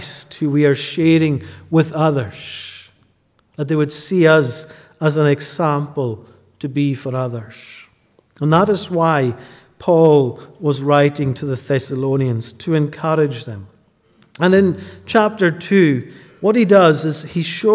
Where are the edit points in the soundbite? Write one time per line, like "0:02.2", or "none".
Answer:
none

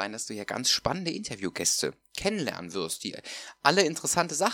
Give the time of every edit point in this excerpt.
none

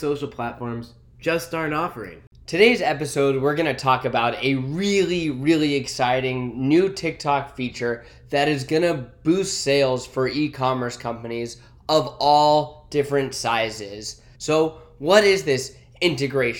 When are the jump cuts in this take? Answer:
0:14.3

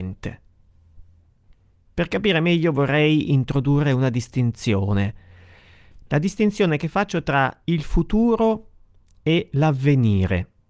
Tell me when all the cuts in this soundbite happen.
none

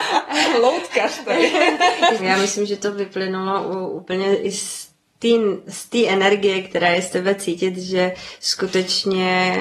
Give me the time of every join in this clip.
0:02.2

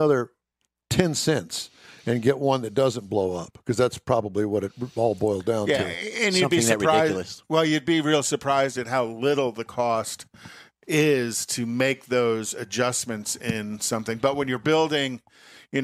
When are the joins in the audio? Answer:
none

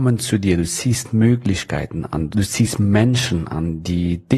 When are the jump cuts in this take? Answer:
0:02.3

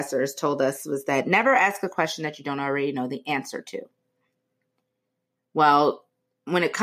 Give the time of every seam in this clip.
none

